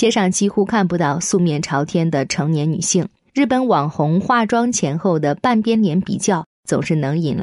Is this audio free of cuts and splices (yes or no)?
yes